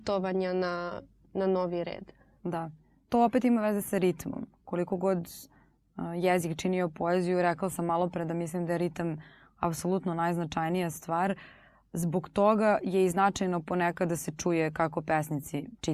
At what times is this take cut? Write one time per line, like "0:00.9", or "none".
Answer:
none